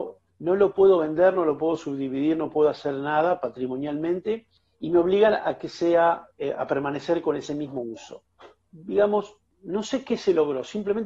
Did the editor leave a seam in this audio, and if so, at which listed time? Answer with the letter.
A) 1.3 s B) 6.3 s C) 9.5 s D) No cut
D